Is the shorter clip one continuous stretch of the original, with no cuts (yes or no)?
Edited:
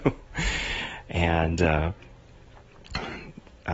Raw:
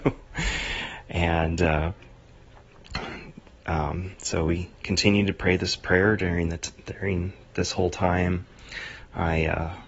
yes